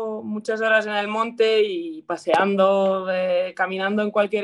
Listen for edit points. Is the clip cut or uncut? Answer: uncut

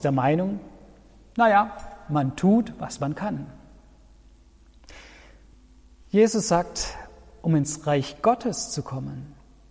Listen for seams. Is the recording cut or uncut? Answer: uncut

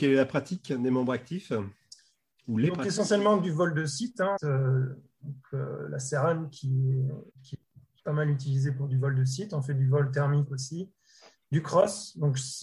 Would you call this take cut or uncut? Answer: cut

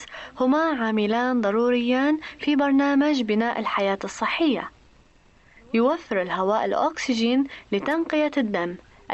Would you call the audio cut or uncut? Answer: uncut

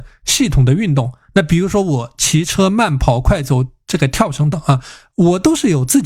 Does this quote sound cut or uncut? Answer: cut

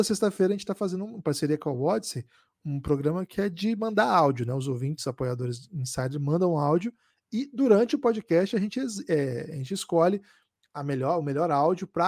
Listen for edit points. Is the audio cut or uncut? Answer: uncut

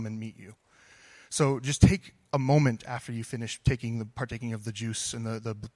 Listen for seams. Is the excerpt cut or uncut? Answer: uncut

